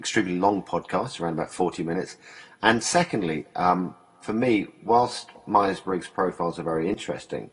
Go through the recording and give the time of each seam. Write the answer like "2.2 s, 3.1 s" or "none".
none

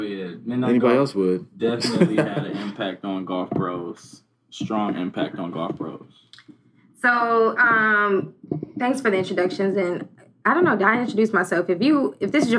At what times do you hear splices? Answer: none

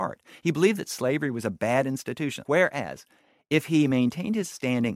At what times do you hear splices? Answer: 2.4 s

